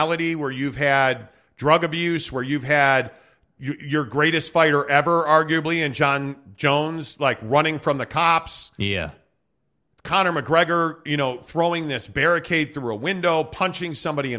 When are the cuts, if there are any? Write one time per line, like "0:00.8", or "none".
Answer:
none